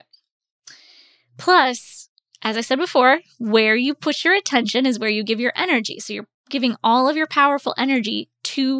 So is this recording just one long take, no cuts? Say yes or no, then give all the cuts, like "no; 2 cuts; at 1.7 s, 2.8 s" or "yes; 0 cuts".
yes; 0 cuts